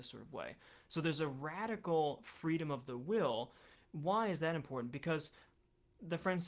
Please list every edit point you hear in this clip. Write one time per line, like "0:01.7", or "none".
none